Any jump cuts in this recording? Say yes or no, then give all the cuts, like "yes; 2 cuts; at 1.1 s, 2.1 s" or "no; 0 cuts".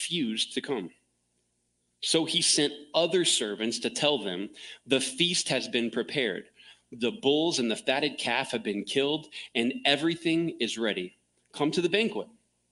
no; 0 cuts